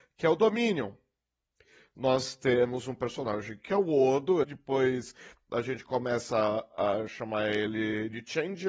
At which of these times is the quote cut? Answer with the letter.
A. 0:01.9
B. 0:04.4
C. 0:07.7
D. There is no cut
B